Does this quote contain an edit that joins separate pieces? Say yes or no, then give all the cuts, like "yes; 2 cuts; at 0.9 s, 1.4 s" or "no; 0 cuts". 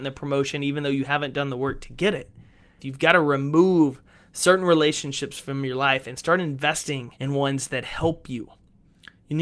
yes; 2 cuts; at 2.8 s, 7.1 s